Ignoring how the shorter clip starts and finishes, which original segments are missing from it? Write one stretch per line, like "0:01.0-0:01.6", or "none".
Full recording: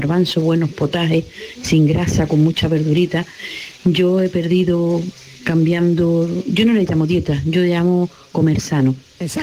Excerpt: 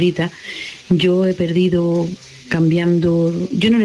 none